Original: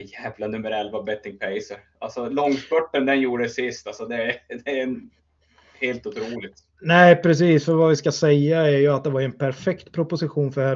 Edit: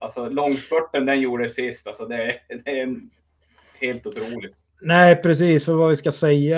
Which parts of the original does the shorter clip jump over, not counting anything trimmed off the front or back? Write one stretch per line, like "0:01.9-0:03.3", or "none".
none